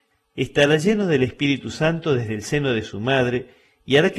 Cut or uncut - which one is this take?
uncut